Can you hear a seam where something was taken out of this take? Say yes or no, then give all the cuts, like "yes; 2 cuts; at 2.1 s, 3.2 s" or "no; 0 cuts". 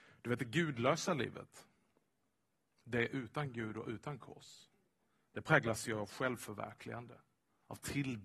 no; 0 cuts